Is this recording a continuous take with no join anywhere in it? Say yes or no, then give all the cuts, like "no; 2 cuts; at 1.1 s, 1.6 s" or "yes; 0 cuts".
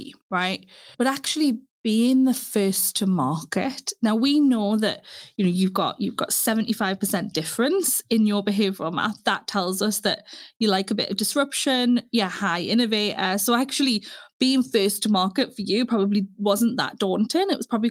no; 1 cut; at 0.9 s